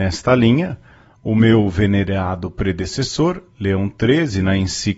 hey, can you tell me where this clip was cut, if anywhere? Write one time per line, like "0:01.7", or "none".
none